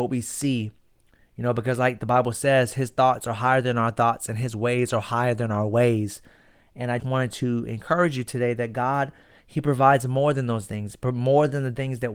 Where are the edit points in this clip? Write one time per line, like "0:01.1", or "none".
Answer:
0:07.0